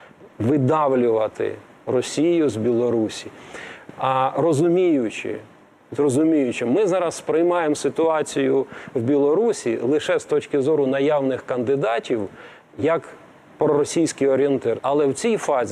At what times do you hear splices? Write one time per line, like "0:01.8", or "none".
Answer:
0:14.8